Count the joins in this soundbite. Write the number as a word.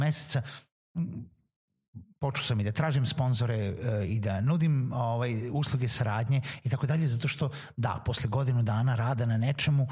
zero